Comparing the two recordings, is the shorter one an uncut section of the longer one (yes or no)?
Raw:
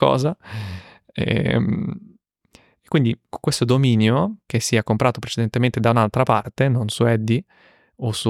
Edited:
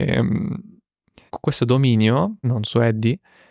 no